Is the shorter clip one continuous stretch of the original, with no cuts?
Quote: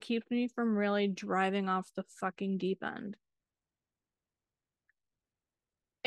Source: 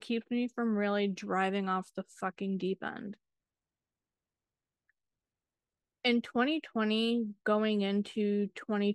yes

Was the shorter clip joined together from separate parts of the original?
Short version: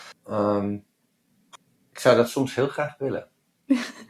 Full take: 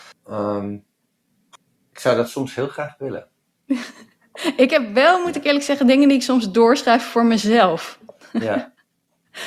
no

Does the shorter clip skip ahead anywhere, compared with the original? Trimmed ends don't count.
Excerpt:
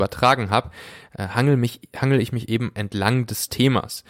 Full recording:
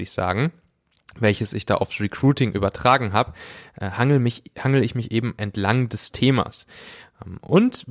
no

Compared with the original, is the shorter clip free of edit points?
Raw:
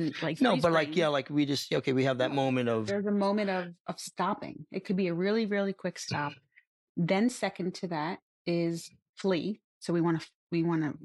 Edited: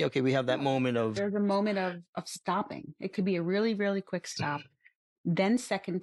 yes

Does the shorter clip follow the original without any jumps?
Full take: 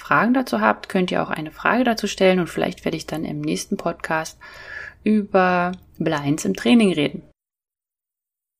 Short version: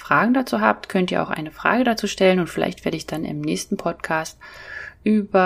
yes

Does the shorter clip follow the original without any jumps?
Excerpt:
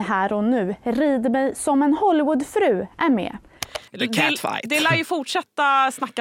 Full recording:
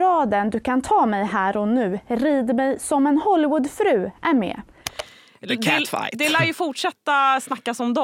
no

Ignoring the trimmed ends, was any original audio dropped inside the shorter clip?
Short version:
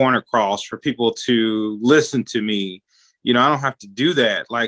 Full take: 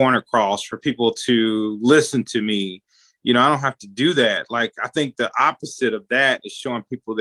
no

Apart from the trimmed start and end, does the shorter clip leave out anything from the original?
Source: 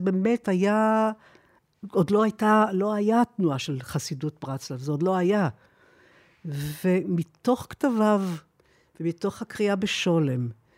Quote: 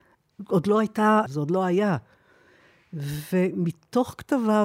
yes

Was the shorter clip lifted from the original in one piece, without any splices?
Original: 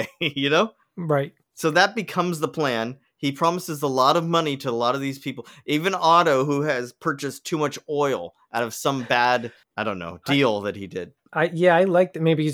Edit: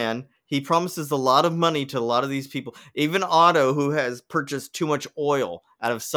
yes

